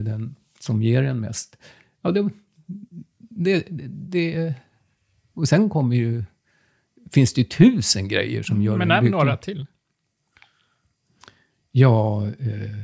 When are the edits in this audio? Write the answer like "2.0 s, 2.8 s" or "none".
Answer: none